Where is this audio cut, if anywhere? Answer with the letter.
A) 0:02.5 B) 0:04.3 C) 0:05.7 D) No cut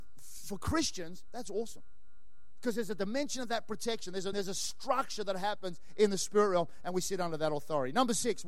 B